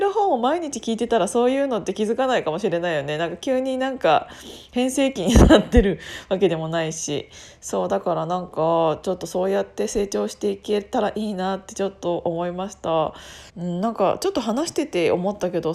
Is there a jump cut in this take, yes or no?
yes